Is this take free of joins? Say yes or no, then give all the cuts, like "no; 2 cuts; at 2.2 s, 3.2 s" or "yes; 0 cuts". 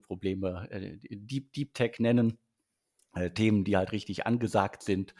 yes; 0 cuts